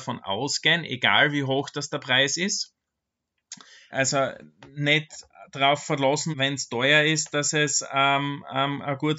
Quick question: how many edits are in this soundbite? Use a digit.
2